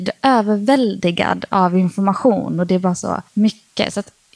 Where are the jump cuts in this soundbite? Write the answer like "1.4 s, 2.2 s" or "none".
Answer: 3.3 s